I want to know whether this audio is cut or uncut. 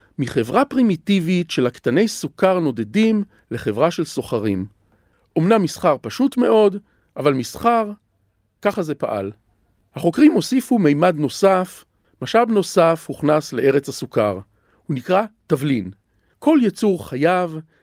uncut